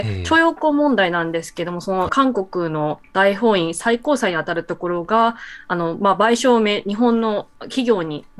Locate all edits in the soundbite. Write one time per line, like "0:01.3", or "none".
0:02.1